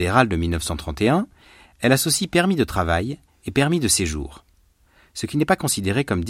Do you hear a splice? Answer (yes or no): no